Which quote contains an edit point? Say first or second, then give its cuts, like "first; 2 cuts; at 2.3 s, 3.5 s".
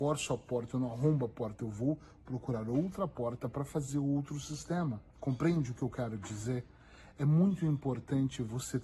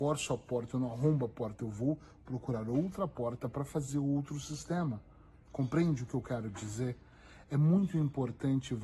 first; 1 cut; at 5.1 s